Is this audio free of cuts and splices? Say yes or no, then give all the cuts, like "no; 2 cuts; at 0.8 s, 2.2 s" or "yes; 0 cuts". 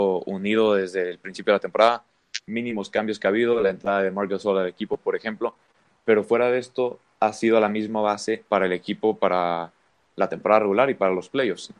yes; 0 cuts